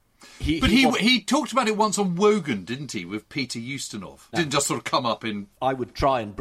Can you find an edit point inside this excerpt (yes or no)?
yes